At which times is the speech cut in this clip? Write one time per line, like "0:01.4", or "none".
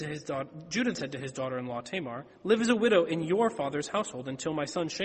0:00.9